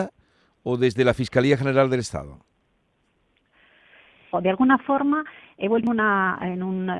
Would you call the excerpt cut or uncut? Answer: cut